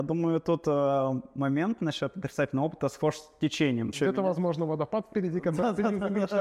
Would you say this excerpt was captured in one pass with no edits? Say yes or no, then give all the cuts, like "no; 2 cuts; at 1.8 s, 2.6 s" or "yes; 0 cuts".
no; 1 cut; at 3.9 s